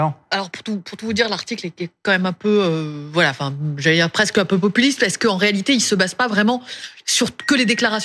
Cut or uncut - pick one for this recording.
uncut